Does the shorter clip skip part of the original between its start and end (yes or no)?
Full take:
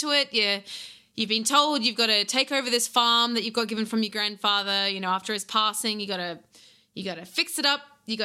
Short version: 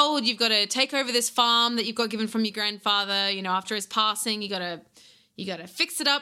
no